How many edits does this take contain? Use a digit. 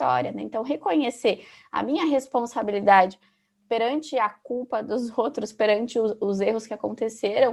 0